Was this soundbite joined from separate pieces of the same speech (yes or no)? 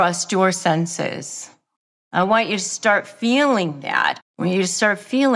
yes